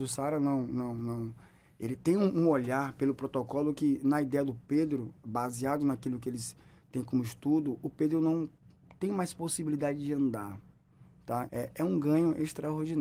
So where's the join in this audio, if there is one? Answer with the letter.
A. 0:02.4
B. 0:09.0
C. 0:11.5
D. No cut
C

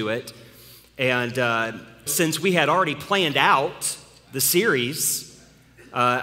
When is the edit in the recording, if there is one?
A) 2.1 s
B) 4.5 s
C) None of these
A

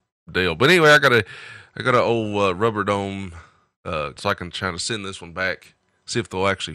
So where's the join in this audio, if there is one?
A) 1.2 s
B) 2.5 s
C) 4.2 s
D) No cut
C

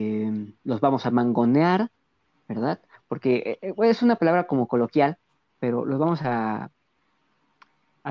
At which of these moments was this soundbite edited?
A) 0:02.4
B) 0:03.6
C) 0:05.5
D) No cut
D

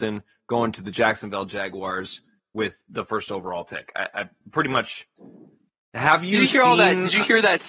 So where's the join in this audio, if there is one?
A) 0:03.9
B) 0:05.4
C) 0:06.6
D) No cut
D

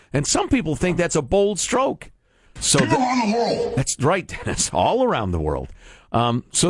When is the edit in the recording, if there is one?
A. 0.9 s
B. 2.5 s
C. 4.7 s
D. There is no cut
B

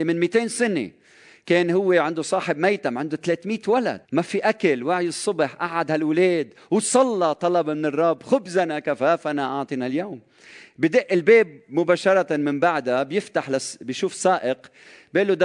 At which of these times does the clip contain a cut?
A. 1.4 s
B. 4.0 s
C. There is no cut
B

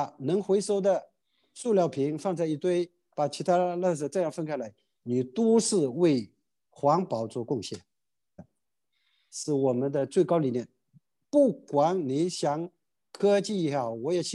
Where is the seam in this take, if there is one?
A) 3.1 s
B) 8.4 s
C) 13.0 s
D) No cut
B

